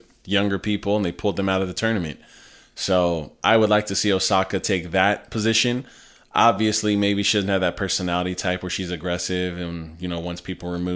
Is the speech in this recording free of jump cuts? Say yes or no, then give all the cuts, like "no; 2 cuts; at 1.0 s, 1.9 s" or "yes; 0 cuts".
yes; 0 cuts